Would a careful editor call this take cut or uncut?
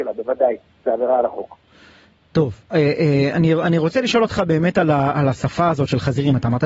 uncut